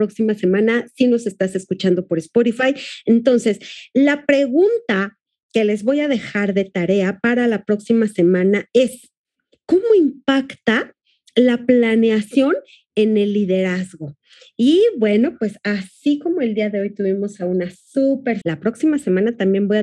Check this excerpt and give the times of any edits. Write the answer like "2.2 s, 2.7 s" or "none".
18.4 s